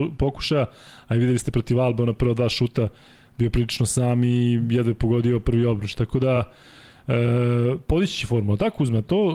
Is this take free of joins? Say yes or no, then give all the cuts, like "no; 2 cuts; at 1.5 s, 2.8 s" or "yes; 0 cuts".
yes; 0 cuts